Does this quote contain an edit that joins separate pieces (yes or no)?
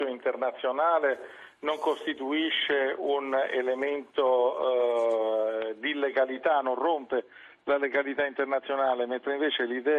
no